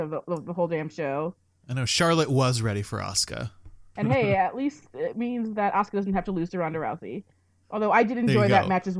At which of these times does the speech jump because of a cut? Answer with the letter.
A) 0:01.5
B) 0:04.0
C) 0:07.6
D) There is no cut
B